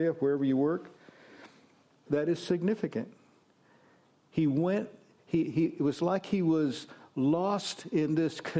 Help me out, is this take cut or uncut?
cut